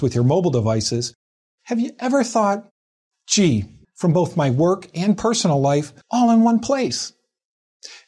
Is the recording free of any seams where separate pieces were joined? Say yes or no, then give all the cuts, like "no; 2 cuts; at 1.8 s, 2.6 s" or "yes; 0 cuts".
no; 2 cuts; at 3.8 s, 6.0 s